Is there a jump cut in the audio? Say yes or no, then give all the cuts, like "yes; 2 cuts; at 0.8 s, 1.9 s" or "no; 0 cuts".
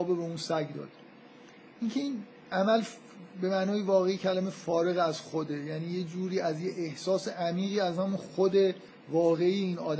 no; 0 cuts